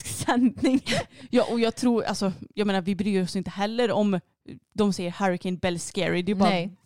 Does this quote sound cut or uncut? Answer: uncut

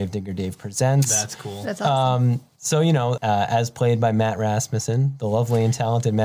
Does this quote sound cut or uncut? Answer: cut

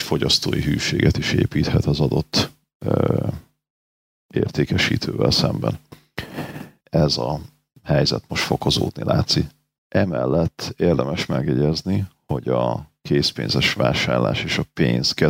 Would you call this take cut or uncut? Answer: cut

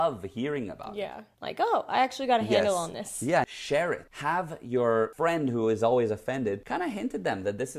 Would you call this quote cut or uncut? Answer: cut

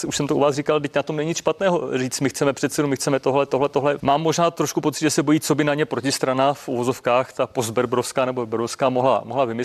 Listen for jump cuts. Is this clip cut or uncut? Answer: cut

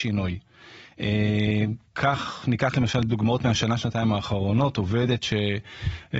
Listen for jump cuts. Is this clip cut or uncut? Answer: uncut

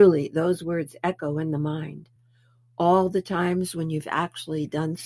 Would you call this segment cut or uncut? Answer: uncut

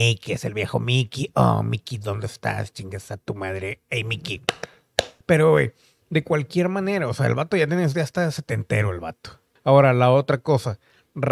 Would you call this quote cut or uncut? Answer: cut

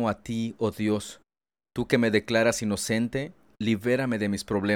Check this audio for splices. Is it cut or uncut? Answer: uncut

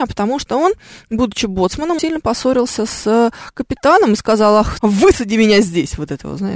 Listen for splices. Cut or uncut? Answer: cut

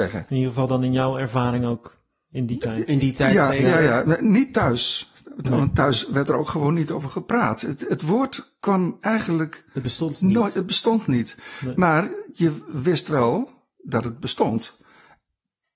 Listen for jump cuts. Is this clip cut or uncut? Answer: uncut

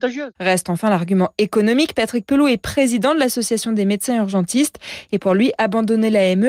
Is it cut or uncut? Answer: uncut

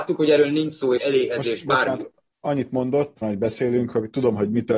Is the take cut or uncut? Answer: cut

